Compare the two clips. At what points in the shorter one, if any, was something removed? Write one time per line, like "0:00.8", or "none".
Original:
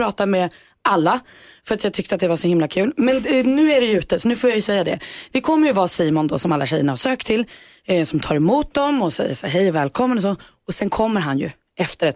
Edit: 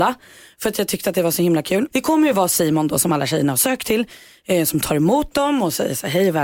0:01.9